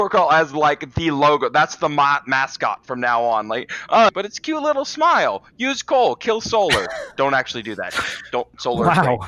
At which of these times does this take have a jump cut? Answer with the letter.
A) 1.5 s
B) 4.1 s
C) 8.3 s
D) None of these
B